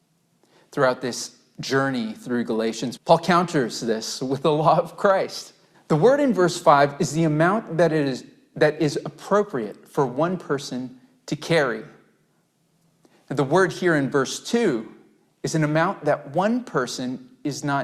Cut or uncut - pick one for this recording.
cut